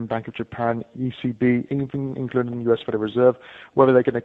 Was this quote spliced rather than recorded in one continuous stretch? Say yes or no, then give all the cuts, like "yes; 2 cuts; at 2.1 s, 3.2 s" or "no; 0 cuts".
no; 0 cuts